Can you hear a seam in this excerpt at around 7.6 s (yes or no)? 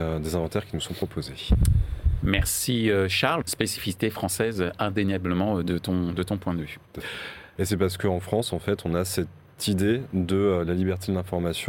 yes